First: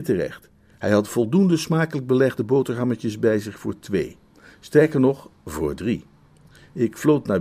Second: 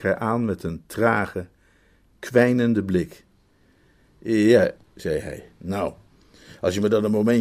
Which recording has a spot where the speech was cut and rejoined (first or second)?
second